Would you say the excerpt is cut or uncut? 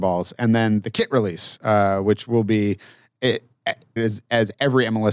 cut